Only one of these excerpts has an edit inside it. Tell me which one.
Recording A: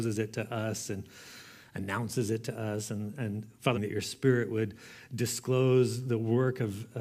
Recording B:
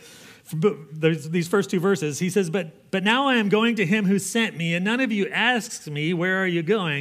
A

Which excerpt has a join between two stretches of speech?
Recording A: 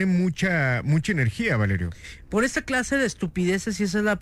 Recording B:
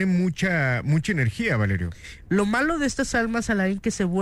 B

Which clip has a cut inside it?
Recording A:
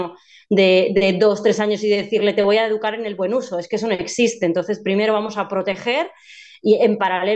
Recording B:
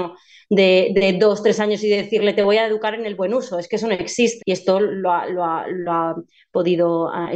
B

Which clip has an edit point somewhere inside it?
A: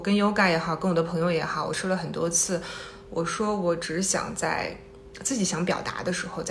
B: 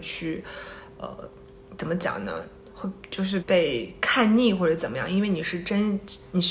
B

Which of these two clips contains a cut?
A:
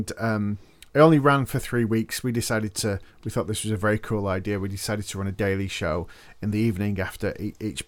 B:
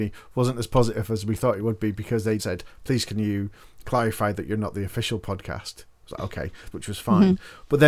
B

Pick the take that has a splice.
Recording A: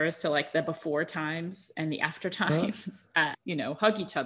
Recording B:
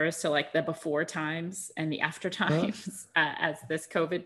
A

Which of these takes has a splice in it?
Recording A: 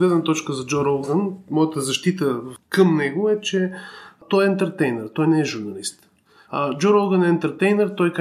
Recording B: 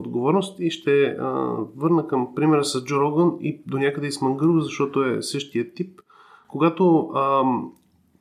A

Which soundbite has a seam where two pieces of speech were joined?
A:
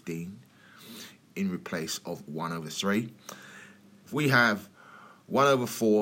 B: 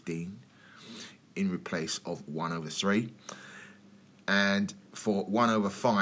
A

